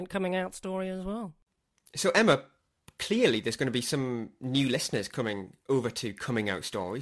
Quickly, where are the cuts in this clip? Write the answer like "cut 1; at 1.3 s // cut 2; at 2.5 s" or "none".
none